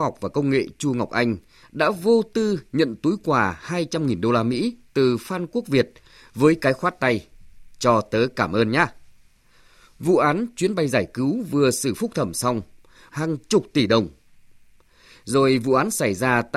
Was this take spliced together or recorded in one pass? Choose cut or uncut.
cut